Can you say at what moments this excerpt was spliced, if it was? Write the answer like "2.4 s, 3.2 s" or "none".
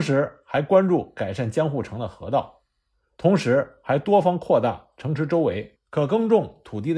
3.2 s

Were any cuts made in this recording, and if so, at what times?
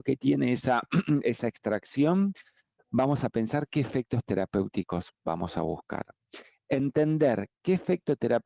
none

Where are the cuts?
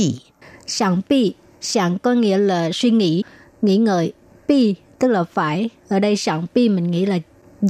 none

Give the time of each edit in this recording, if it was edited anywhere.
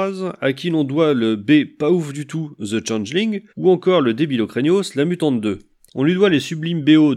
3.5 s, 5.9 s

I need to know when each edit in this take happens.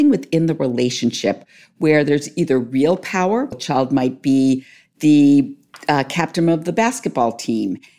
3.5 s

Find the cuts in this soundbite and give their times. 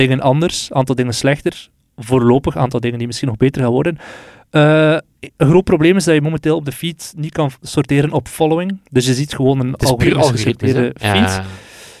none

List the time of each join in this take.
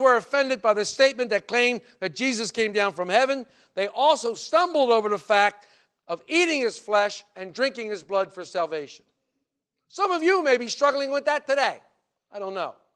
none

